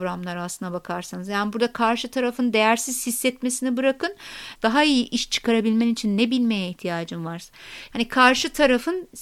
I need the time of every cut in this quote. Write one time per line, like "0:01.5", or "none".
0:04.6
0:07.9